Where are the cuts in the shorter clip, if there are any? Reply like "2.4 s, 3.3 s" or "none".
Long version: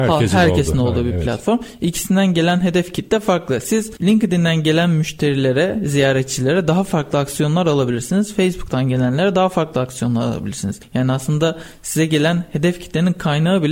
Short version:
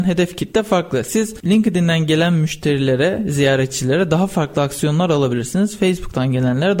none